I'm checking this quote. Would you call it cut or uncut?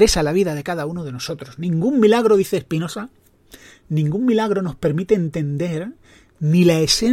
uncut